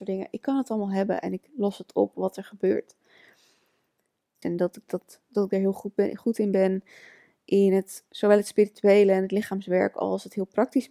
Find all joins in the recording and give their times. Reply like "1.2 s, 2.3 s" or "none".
4.4 s

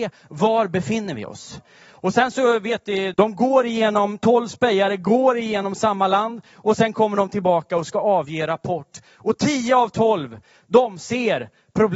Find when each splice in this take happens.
3.1 s

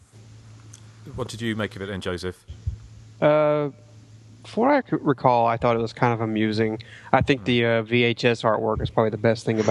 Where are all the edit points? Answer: none

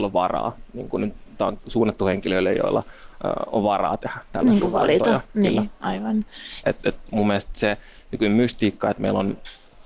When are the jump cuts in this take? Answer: 6.6 s

